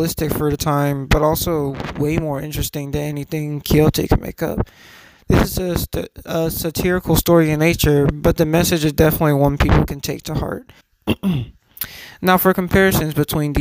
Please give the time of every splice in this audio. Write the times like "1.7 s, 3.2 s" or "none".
10.8 s